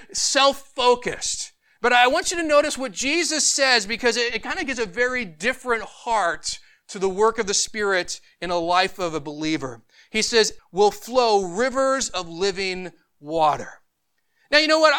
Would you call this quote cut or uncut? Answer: cut